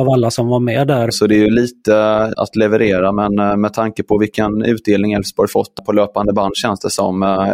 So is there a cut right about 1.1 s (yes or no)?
yes